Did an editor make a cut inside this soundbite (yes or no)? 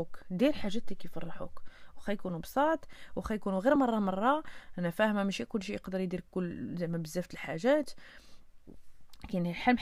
no